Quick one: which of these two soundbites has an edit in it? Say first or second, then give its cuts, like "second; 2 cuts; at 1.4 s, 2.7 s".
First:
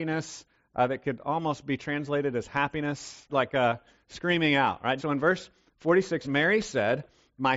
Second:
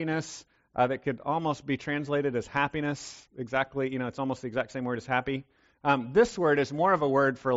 first; 3 cuts; at 3.3 s, 5.0 s, 6.2 s